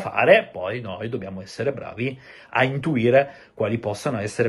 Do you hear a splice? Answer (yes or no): no